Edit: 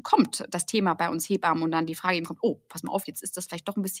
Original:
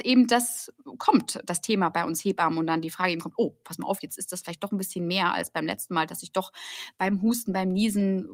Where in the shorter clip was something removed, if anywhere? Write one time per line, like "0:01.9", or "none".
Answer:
none